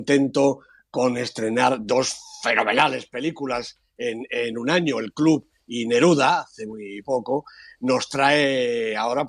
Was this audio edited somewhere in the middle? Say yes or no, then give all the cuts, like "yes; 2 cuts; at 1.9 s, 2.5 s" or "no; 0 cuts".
no; 0 cuts